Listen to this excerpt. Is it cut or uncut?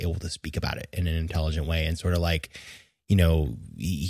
uncut